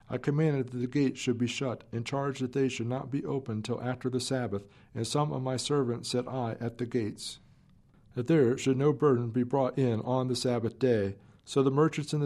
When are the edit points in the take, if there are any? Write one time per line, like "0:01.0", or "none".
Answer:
none